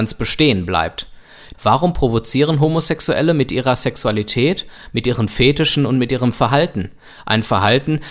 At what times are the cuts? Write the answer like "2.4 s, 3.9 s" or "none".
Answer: 1.5 s